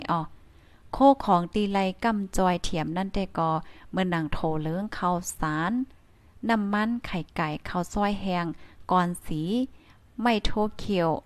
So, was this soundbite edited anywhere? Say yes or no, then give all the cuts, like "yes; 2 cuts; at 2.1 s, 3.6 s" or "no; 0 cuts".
no; 0 cuts